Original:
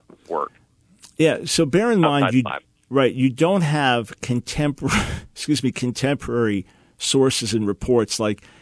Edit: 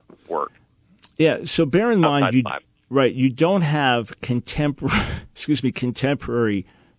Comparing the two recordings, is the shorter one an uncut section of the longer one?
yes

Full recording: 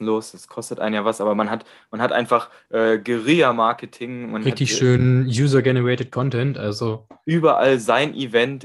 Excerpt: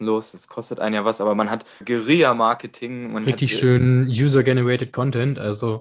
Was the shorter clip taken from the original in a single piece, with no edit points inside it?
no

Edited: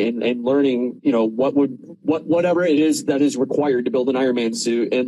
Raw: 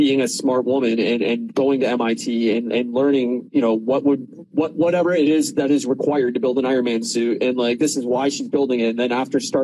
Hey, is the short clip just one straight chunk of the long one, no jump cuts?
yes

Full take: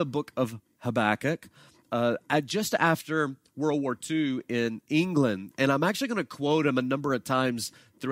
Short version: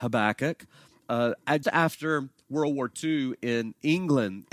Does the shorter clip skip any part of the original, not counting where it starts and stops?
yes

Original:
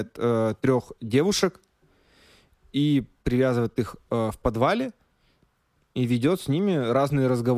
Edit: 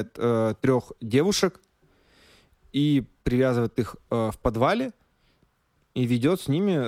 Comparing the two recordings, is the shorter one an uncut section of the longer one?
yes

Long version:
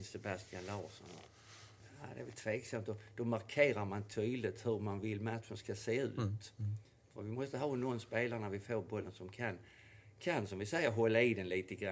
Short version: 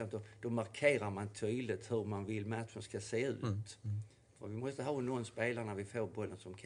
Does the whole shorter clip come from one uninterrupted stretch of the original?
yes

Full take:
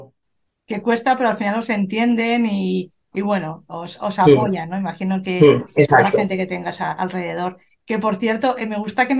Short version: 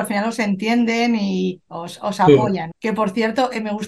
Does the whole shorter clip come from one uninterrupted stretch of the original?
no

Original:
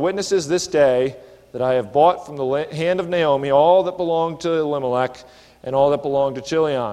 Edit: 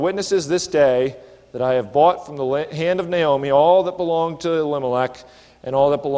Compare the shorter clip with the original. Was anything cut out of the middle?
no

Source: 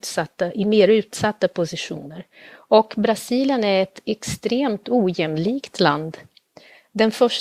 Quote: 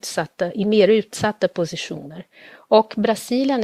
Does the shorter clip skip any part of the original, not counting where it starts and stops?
no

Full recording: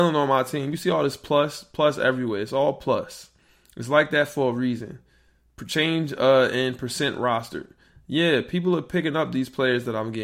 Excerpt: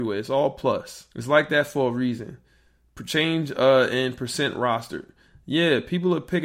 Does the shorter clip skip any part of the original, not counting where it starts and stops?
yes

